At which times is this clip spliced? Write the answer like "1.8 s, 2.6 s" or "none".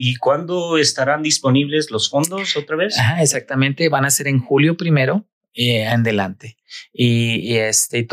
none

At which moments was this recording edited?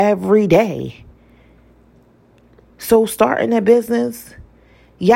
2.7 s

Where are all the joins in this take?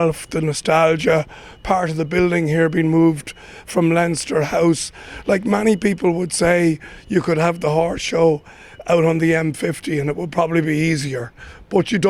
none

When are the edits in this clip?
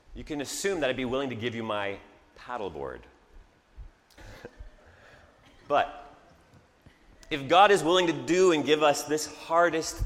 4.2 s

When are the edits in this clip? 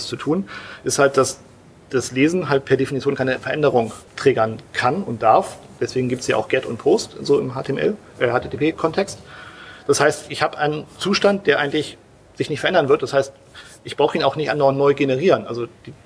4.1 s

